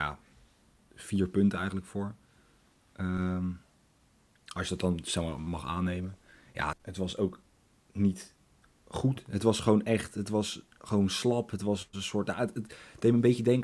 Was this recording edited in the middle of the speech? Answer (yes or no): yes